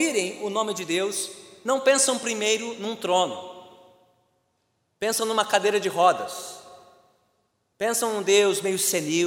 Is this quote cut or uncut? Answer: uncut